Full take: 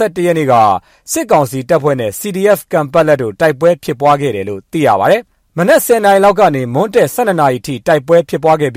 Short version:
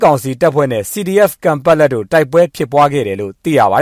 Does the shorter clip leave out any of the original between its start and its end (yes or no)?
no